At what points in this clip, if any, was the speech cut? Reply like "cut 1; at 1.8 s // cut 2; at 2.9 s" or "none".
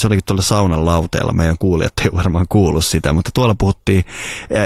none